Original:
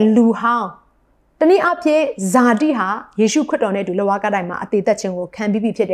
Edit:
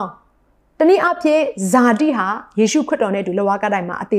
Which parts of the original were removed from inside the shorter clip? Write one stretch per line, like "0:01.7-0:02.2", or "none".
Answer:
none